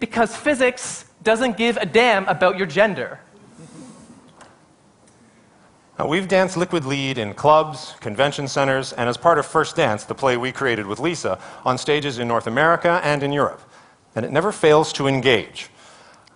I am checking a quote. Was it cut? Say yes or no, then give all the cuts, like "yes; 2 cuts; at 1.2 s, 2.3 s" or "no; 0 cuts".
no; 0 cuts